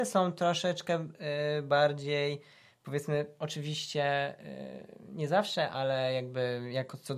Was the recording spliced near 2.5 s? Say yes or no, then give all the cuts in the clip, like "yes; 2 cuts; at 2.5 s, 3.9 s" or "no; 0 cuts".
no; 0 cuts